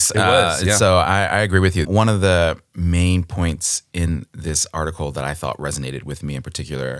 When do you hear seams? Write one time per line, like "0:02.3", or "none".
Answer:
0:01.8